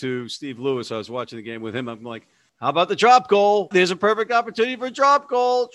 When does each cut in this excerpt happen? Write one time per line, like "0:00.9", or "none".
0:03.7